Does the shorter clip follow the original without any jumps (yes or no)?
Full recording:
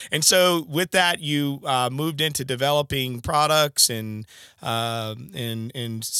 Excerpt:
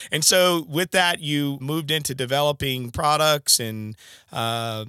no